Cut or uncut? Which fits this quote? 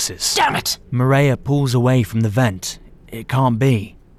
uncut